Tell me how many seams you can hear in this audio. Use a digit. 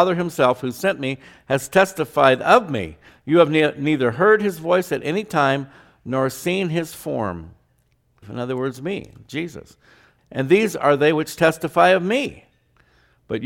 2